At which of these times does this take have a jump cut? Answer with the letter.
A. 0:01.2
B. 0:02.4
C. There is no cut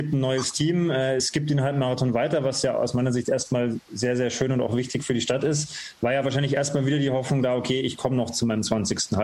C